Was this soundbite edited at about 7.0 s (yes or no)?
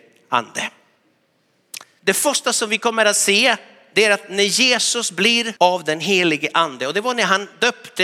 no